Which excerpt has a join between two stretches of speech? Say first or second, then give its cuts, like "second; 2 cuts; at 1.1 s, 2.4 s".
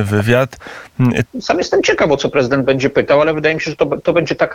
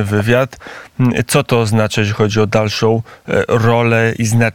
first; 1 cut; at 1.3 s